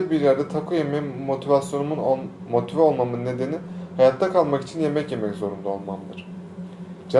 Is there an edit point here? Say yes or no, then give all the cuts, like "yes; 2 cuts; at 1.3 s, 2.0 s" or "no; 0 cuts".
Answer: no; 0 cuts